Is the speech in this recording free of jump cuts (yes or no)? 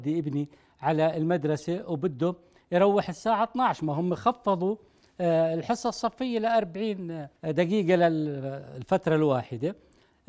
no